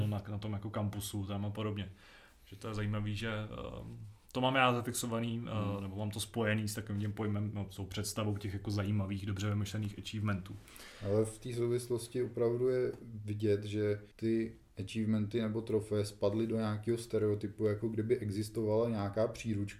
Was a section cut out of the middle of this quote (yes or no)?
yes